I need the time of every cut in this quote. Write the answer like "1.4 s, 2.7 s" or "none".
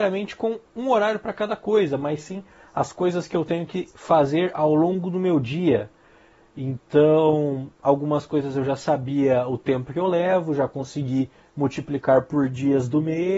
none